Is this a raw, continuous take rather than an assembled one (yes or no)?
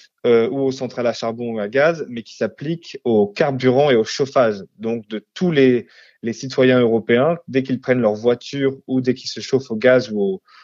yes